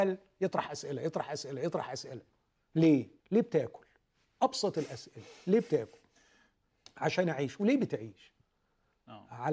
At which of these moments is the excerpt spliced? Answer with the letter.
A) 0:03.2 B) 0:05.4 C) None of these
A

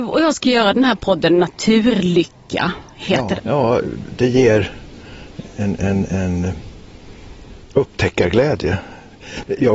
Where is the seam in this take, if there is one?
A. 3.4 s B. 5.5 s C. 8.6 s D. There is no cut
A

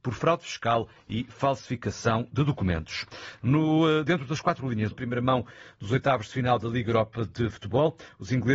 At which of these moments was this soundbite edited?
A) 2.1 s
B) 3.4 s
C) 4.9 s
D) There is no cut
C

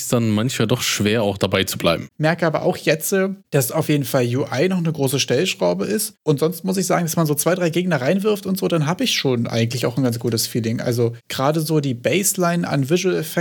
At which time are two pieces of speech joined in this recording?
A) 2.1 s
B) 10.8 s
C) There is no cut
A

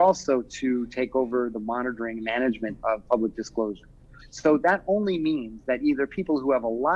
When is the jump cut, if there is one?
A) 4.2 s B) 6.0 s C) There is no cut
A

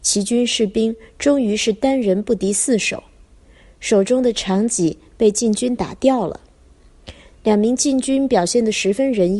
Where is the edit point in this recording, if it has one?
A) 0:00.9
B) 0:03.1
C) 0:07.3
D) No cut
C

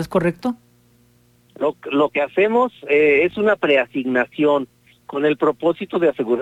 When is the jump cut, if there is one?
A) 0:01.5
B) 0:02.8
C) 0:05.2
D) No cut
A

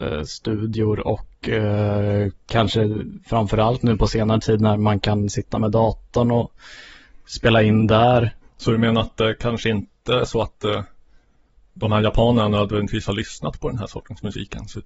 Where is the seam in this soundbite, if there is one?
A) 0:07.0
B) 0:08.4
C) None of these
B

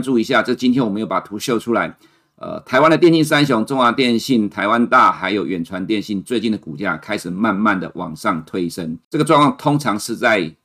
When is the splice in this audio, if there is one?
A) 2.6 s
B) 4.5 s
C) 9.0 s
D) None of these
C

